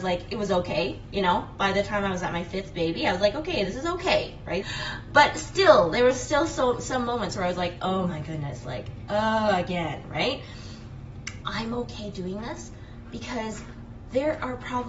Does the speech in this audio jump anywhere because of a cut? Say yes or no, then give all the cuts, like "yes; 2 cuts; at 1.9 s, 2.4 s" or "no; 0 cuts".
yes; 2 cuts; at 4.6 s, 11.4 s